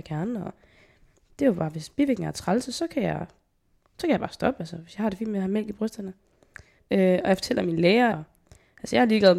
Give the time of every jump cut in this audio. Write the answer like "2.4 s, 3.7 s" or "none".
6.8 s, 8.1 s